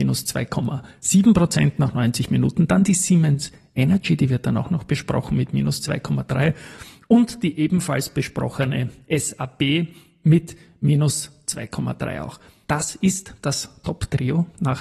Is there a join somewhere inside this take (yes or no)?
yes